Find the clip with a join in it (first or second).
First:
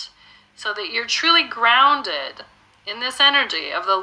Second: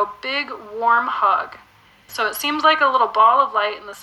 second